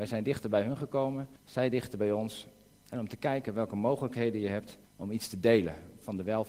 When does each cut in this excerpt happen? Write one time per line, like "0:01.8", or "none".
0:01.4
0:02.7
0:04.9